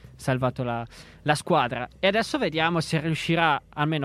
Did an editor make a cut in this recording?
no; 0 cuts

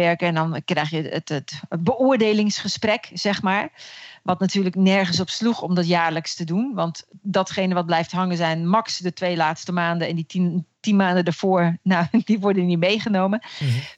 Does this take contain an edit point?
no; 0 cuts

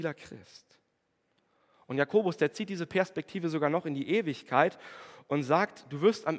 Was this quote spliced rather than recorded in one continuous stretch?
no; 0 cuts

